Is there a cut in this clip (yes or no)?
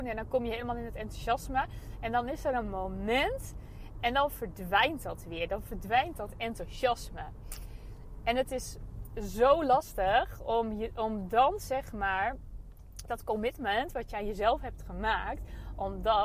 no